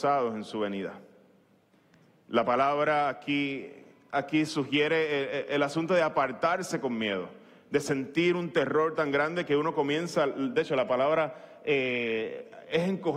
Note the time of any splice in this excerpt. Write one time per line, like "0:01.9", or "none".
none